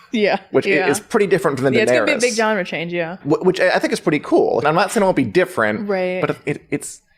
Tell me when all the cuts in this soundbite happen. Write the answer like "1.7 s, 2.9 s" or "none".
3.2 s, 4.6 s